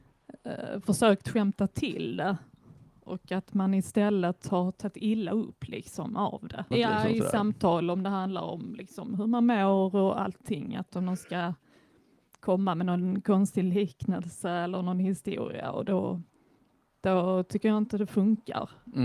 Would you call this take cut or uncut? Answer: cut